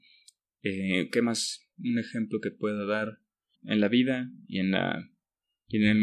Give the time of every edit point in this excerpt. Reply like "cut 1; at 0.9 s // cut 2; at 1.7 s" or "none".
cut 1; at 3.6 s